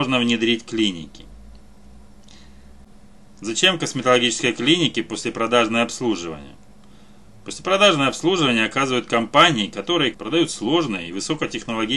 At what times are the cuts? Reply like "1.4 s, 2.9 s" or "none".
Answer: 10.1 s